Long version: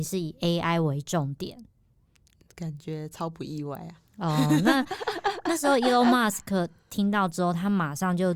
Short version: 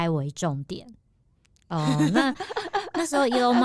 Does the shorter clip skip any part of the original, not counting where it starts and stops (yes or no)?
yes